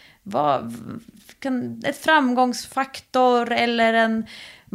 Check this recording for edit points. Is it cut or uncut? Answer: uncut